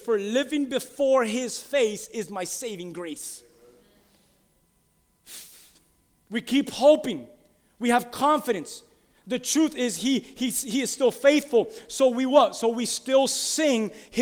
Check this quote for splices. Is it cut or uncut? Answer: uncut